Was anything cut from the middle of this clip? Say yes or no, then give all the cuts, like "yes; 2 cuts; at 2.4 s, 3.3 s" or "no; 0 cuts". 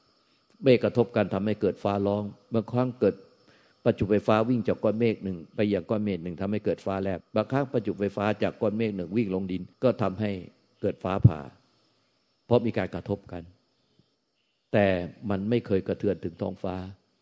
yes; 2 cuts; at 7.2 s, 9.7 s